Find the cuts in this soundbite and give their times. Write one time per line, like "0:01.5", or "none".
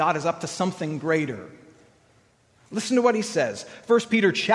none

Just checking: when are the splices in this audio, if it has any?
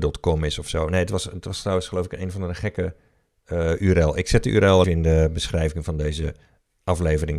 0:04.8

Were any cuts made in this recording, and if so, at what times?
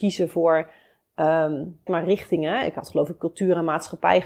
0:01.9

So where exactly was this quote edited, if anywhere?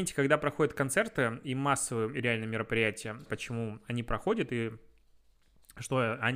0:03.3

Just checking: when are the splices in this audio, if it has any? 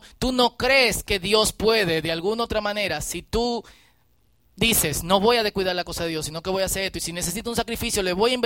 none

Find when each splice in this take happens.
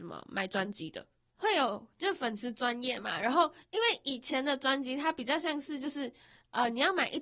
0:01.3

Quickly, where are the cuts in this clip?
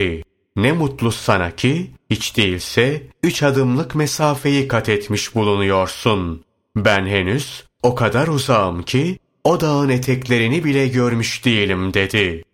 none

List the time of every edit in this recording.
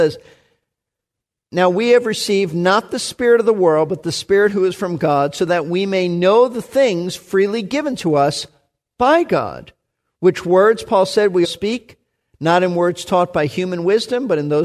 0:11.4

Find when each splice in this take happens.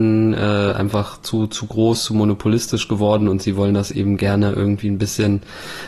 none

